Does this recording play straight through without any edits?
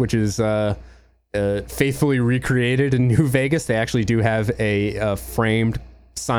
yes; 0 cuts

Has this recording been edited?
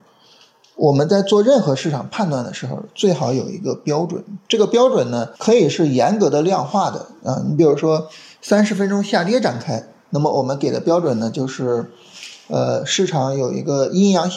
yes; 1 cut; at 5.4 s

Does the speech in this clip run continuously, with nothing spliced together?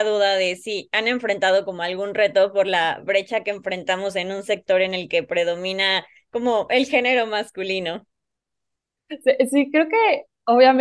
yes; 0 cuts

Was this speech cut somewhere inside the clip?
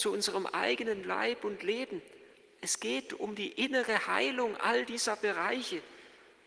no; 0 cuts

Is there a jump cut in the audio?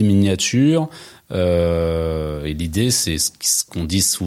no; 0 cuts

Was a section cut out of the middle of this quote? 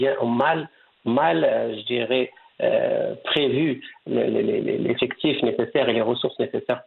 no; 0 cuts

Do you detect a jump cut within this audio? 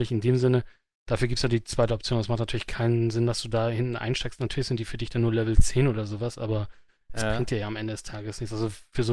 no; 0 cuts

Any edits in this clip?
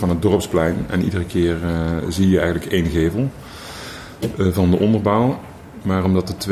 no; 0 cuts

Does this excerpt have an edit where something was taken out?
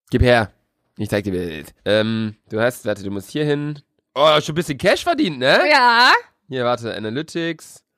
yes; 1 cut; at 1.8 s

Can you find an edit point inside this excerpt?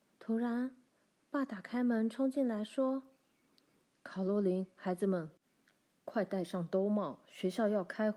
no; 0 cuts

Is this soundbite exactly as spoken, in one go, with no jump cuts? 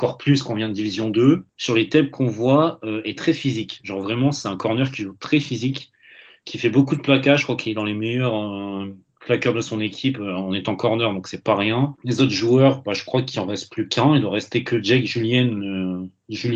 no; 3 cuts; at 1.5 s, 3.2 s, 12.0 s

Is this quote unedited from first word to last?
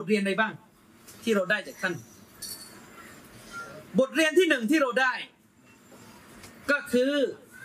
yes; 0 cuts

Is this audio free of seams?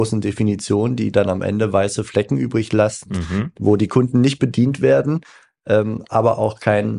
yes; 0 cuts

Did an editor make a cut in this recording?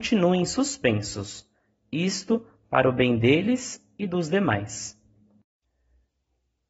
no; 0 cuts

